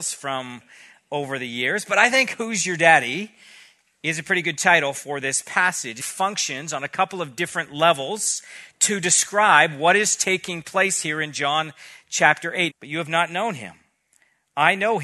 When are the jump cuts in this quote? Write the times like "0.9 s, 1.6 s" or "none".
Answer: 6.0 s, 12.7 s

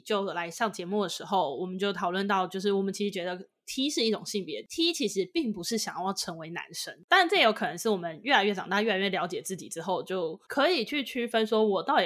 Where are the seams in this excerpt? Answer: none

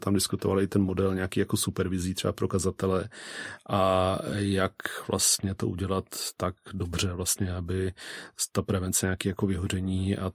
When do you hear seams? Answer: none

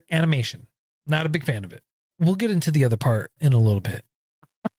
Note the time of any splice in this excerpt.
2.1 s, 3.4 s

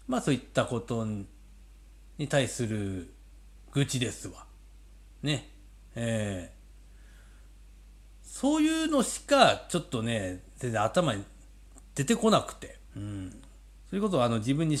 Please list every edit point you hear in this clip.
12.9 s

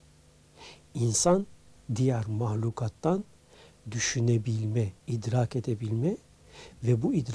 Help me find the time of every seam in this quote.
5.0 s

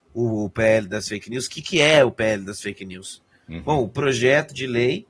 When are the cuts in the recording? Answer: none

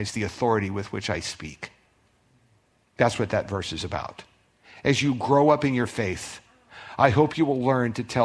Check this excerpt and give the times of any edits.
none

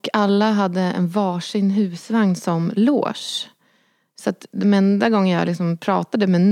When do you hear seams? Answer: none

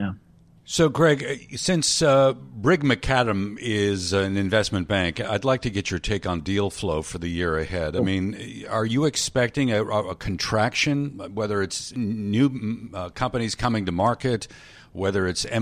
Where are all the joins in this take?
none

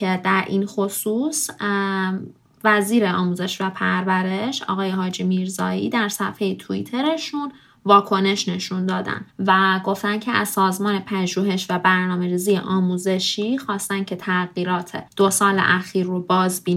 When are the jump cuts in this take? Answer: 9.3 s, 15.1 s

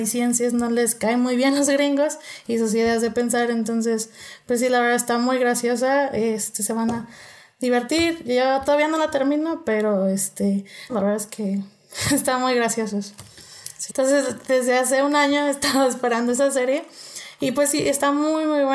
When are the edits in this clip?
10.9 s, 13.9 s

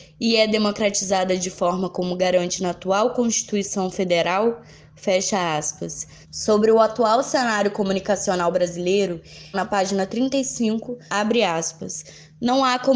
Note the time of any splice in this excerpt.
6.2 s, 9.5 s, 11.1 s

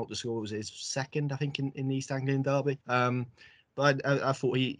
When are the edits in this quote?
2.8 s

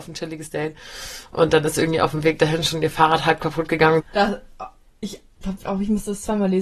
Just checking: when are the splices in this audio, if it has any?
4.0 s

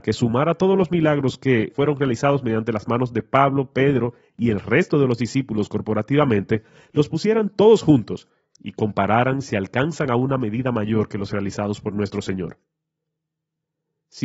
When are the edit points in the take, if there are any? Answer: 1.7 s

